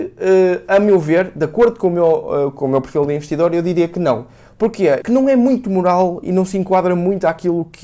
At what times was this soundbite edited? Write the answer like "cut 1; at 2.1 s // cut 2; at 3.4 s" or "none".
cut 1; at 5.0 s